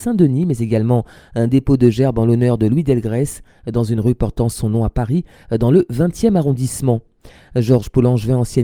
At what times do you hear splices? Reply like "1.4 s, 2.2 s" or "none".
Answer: none